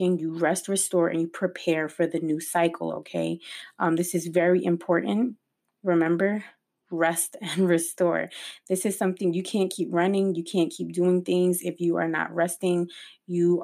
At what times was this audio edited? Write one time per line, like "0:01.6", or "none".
none